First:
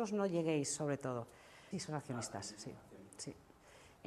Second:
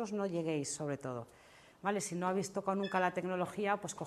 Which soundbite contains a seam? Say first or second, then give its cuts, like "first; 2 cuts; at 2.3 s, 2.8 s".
first; 1 cut; at 1.7 s